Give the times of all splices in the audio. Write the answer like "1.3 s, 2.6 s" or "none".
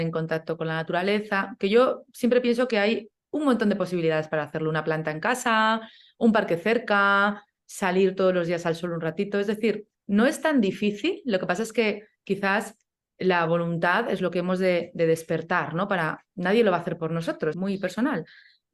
17.5 s